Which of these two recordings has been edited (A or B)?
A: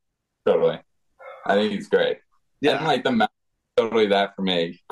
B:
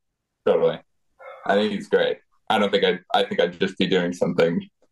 B